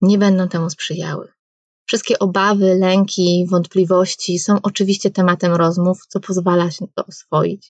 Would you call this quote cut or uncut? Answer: cut